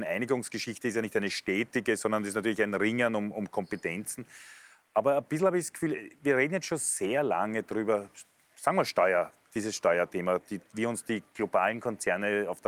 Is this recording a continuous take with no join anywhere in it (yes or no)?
yes